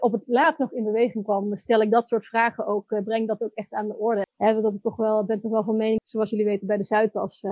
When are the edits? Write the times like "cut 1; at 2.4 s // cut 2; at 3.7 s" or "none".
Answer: cut 1; at 4.2 s // cut 2; at 6.0 s